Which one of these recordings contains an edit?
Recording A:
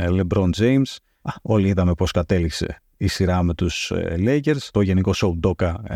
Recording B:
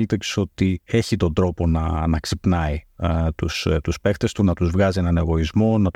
A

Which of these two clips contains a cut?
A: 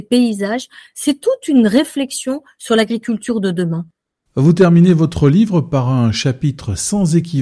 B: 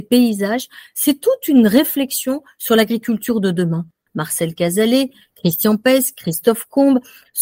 B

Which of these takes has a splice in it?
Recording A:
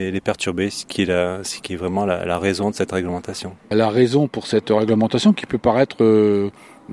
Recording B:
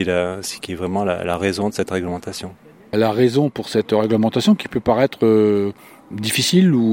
A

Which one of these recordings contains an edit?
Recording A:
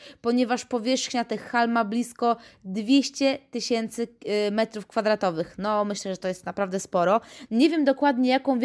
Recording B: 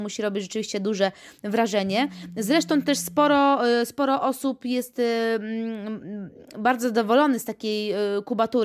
A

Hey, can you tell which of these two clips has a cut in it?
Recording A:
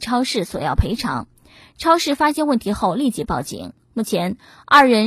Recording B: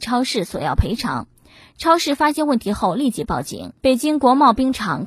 B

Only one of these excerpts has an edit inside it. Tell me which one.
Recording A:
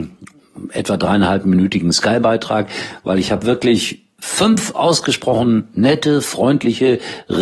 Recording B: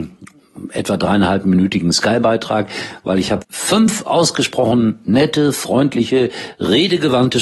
B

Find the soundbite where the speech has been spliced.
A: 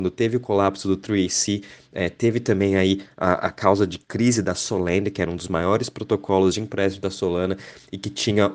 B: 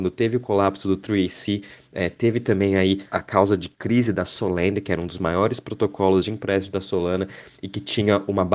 B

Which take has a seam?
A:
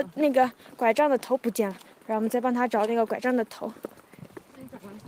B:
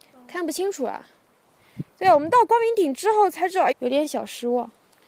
B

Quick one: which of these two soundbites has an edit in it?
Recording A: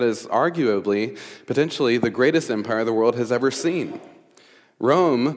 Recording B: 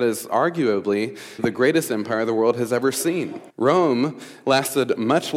B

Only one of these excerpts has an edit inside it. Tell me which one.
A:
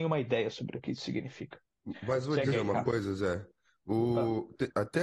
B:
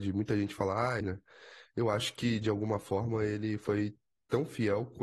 B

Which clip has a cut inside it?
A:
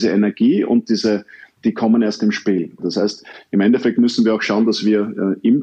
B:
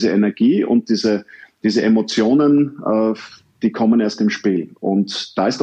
A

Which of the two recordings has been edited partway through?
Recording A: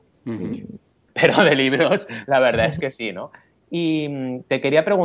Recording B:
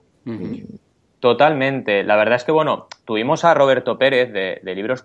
A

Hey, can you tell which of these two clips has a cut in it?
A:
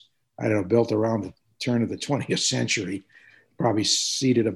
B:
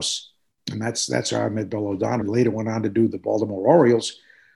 B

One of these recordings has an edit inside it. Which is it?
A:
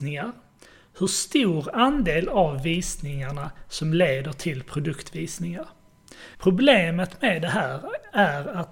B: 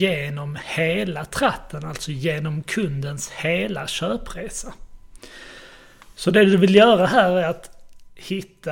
A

